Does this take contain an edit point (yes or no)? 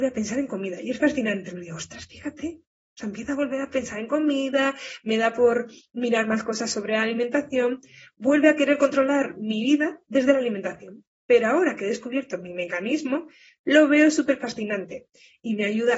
no